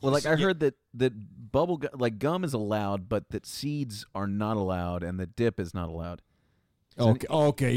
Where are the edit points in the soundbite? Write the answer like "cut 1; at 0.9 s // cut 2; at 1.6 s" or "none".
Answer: none

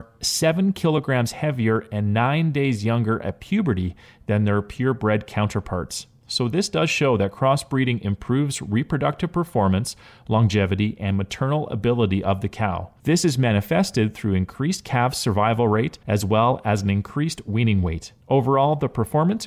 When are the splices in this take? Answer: none

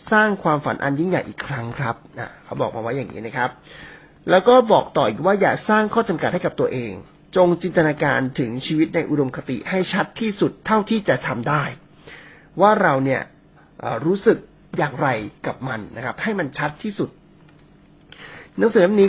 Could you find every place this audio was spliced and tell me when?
none

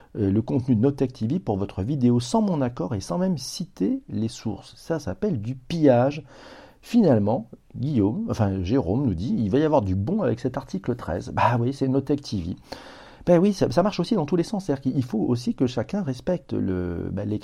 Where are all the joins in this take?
none

